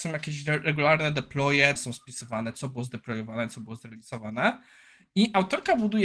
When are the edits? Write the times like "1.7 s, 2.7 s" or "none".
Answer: 1.8 s